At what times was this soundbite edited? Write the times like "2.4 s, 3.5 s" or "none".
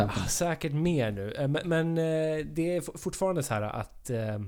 none